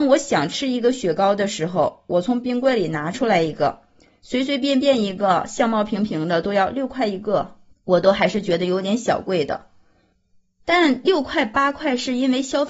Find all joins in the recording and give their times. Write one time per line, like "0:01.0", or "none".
0:07.7